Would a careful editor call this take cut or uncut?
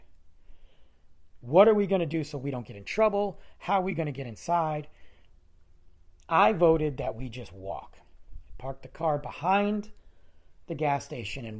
cut